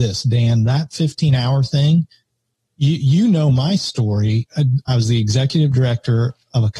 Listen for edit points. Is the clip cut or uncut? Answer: cut